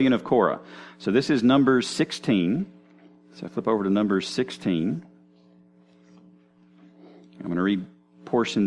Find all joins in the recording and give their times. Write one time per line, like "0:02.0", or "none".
none